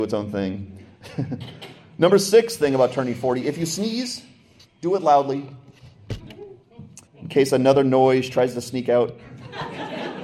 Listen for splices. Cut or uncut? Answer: cut